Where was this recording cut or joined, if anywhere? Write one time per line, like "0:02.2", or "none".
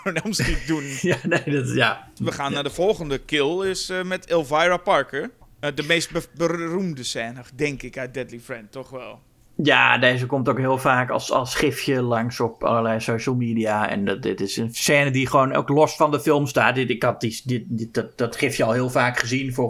none